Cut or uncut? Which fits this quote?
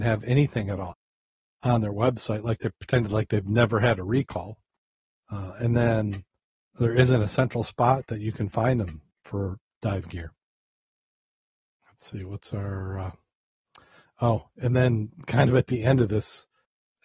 uncut